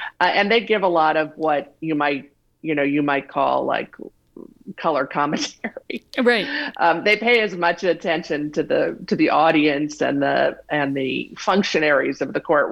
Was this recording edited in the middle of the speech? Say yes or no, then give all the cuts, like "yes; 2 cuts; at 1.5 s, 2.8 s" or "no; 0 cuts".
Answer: no; 0 cuts